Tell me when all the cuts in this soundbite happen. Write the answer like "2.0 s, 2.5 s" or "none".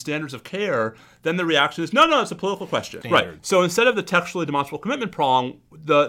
3.0 s

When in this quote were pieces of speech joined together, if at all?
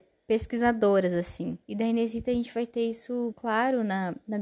1.6 s, 3.3 s

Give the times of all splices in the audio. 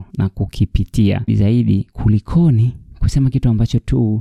1.3 s

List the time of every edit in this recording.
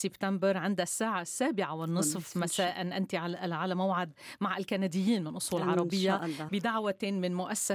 6.5 s

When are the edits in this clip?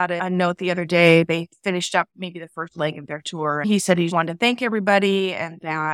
2.1 s, 4.1 s

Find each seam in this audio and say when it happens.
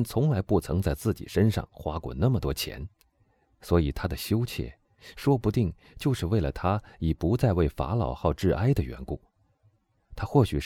3.4 s

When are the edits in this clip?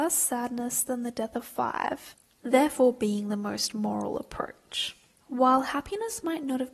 none

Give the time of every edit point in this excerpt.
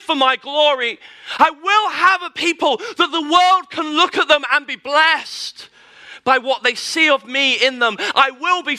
none

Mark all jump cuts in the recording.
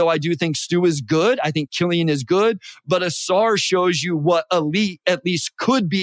none

